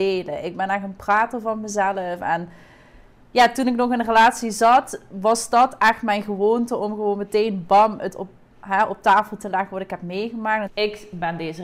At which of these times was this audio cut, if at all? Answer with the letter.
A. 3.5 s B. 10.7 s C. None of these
B